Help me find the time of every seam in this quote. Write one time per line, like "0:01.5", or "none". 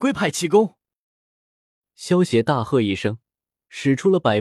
none